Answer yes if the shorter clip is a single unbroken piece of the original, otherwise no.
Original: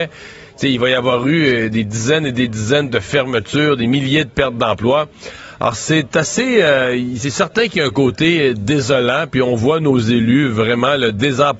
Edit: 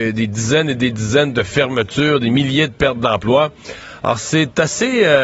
yes